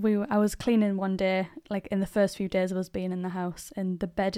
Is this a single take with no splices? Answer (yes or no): yes